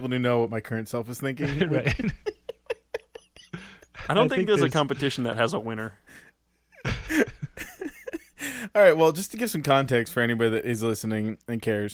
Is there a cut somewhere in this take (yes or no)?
no